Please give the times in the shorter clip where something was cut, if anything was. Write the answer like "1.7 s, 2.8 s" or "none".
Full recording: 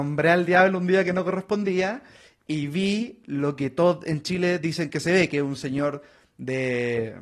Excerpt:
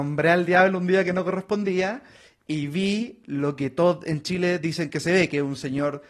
none

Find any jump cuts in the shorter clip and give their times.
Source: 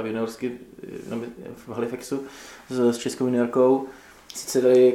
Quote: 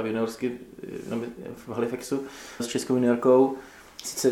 2.6 s

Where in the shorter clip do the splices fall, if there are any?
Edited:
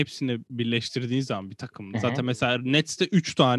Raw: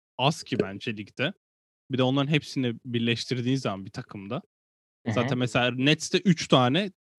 1.9 s

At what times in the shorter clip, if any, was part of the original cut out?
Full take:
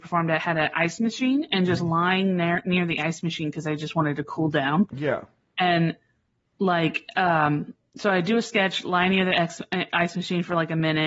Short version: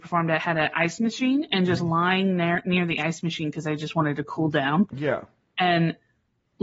none

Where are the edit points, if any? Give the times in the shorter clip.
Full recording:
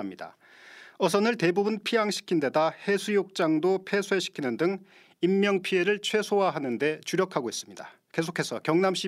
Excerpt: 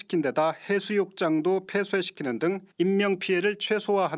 2.7 s

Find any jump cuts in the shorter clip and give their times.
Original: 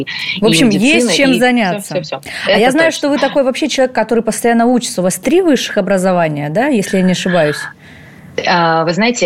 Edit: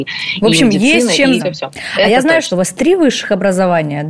1.4 s, 2.5 s

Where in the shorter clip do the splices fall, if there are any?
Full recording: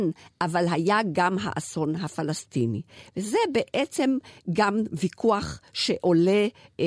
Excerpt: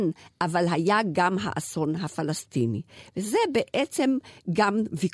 none

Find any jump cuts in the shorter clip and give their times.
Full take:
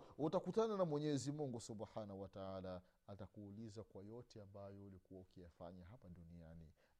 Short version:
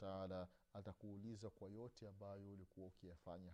none

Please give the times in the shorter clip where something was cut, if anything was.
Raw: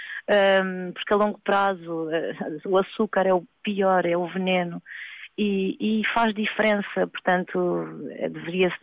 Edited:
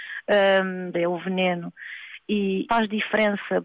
0.9 s, 2.7 s

